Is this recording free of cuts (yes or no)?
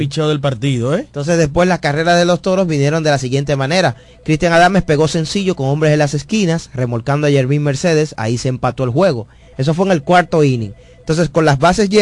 yes